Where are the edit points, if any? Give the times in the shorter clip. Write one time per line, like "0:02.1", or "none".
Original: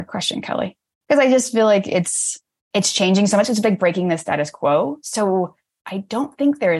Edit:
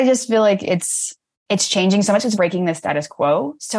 0:02.4